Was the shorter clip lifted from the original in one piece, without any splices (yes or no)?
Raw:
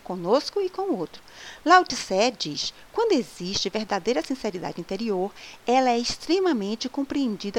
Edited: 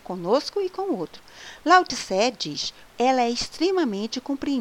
no